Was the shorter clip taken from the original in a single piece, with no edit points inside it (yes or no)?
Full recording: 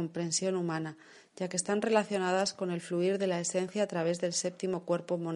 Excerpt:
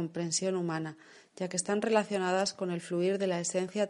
yes